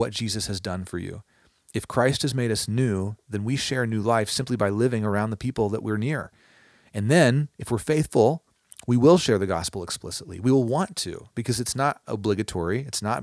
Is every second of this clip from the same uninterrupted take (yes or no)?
yes